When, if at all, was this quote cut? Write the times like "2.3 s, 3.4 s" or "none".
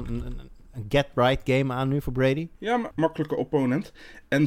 2.9 s